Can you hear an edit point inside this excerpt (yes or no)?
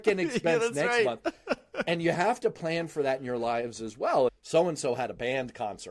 yes